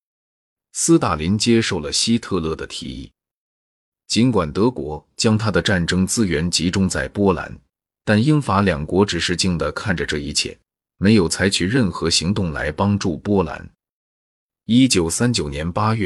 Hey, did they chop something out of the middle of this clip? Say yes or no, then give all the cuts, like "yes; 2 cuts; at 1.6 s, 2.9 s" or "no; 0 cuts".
yes; 1 cut; at 9.4 s